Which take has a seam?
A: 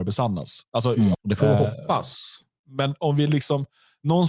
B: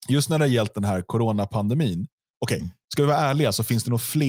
A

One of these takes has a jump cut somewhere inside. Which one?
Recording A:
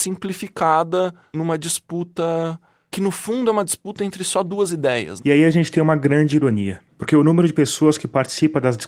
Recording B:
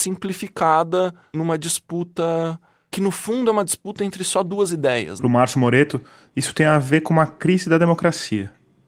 A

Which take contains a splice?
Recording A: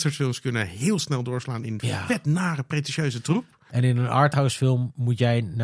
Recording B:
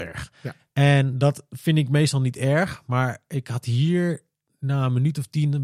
A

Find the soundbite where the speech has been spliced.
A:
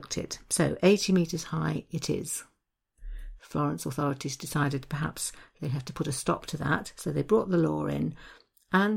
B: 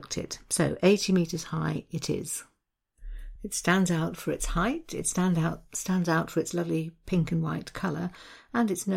A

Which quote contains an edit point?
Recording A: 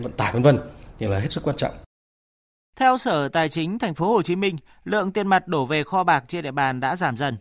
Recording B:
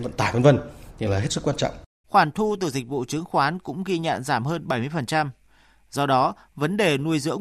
B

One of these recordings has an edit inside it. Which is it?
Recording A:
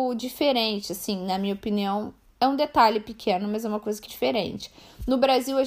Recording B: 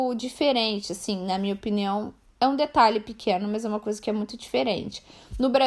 A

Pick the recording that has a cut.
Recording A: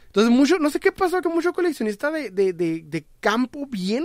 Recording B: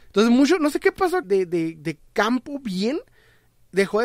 B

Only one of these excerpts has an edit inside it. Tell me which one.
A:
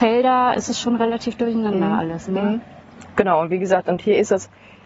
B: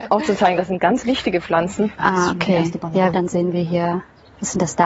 B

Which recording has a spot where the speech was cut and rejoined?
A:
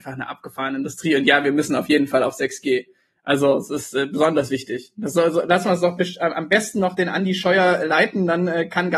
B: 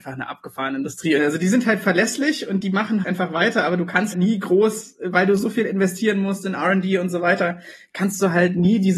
B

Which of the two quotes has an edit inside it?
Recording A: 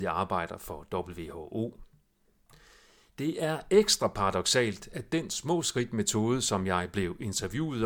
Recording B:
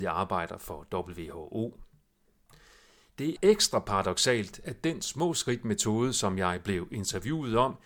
B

